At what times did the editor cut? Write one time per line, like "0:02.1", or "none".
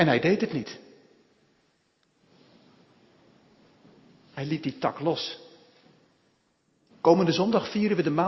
0:06.9